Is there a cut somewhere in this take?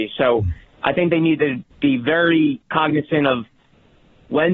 yes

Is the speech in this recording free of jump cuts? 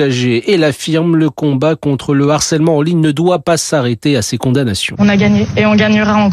yes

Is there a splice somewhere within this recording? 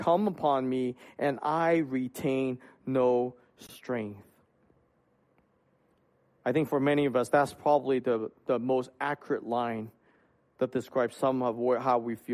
no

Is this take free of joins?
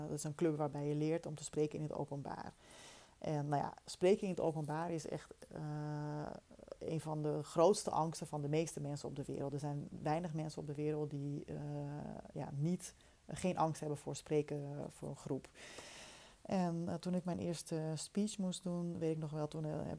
yes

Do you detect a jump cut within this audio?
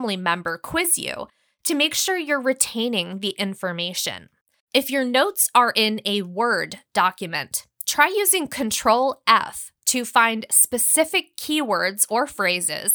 yes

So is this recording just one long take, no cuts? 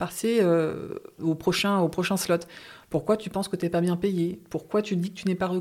no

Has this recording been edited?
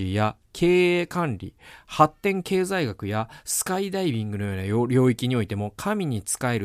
no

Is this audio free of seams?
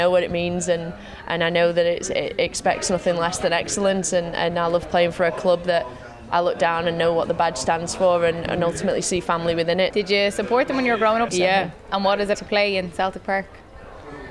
no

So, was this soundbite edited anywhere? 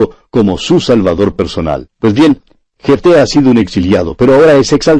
yes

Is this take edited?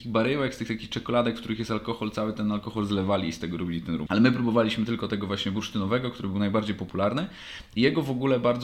yes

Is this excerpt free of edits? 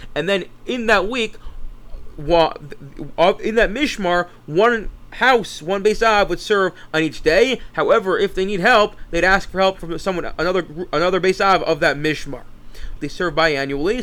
no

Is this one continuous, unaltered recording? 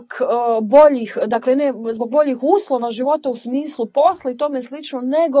yes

